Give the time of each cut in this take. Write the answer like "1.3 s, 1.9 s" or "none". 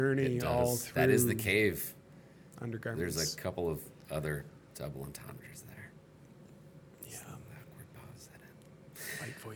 none